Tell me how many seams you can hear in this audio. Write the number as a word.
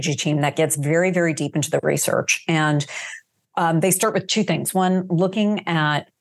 zero